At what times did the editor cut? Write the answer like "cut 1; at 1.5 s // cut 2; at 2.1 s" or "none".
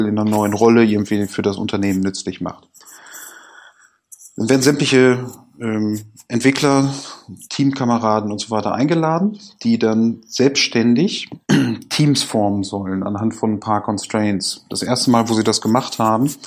cut 1; at 7.5 s